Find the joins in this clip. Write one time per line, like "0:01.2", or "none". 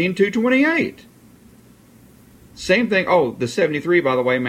none